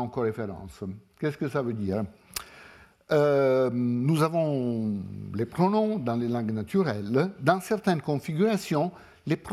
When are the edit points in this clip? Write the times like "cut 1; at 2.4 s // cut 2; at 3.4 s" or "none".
none